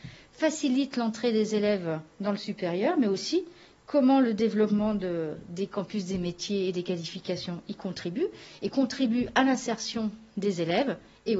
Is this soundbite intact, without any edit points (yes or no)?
yes